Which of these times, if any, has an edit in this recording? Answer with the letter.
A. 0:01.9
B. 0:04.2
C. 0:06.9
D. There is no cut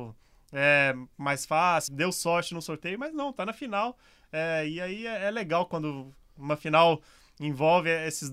A